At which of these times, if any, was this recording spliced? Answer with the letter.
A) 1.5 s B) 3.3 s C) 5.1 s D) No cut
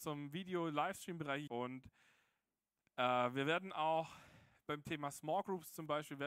A